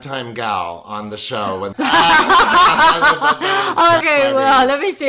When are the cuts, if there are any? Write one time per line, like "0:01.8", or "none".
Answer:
0:01.7
0:04.0